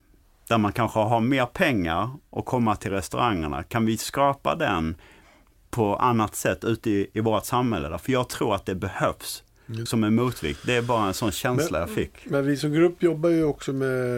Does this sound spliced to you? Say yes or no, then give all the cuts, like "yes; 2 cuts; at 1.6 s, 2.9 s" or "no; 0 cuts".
yes; 1 cut; at 9.9 s